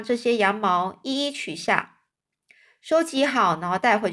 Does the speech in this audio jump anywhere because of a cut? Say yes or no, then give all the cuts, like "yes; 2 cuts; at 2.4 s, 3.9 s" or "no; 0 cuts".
no; 0 cuts